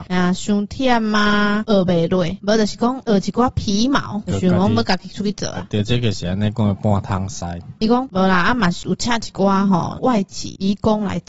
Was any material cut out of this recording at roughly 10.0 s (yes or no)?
no